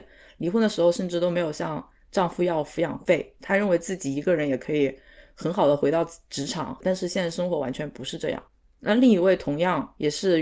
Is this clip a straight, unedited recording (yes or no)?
no